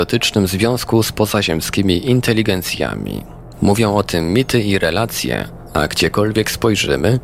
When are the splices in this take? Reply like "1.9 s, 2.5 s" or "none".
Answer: none